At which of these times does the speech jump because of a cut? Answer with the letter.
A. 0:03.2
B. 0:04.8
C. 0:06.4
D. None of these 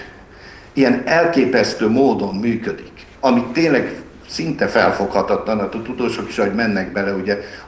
A